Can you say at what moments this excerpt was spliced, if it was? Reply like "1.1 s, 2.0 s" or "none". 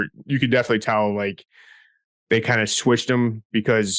none